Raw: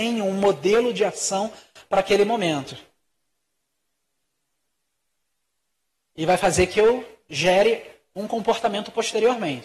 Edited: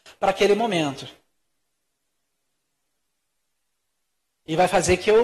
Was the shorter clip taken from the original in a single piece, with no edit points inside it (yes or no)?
yes